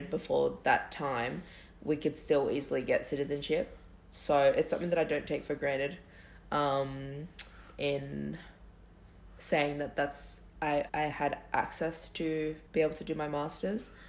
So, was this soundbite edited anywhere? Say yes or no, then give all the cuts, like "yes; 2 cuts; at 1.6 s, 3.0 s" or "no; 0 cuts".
yes; 2 cuts; at 10.9 s, 12.7 s